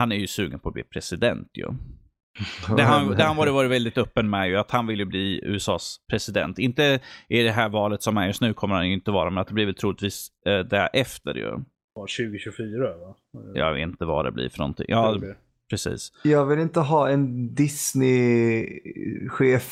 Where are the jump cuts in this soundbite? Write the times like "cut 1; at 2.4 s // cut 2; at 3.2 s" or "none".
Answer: none